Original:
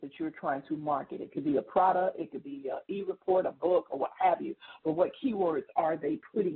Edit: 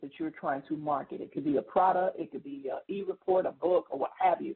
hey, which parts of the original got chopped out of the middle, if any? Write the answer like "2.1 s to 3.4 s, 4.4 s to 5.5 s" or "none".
none